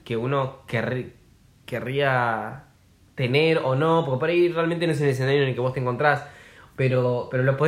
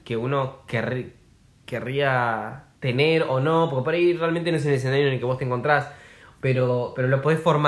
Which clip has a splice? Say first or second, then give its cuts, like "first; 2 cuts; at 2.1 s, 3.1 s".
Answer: second; 1 cut; at 2.7 s